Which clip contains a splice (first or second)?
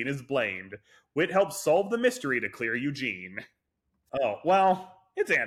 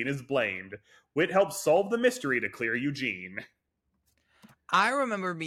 first